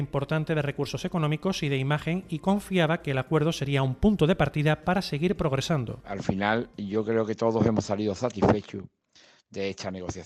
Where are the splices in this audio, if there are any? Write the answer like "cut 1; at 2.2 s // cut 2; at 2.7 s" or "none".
cut 1; at 6.0 s